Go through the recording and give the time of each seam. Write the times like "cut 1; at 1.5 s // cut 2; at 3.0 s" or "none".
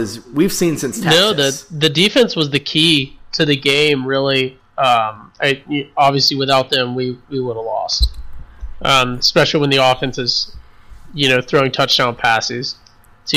none